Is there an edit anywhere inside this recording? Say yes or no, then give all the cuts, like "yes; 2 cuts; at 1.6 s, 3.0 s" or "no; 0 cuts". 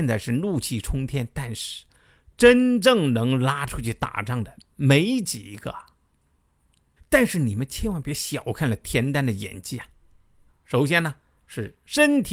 yes; 2 cuts; at 7.0 s, 10.5 s